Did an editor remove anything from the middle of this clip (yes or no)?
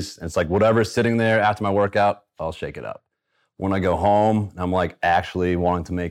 no